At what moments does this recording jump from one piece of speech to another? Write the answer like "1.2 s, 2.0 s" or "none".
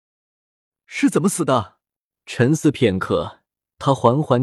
2.1 s